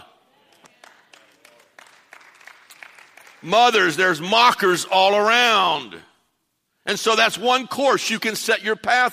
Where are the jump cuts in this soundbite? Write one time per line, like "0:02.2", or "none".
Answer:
none